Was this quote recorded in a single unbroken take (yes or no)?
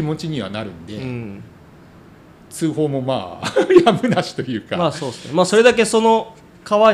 yes